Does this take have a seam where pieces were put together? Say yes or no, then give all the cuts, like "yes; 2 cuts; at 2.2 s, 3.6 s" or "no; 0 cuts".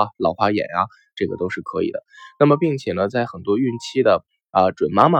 no; 0 cuts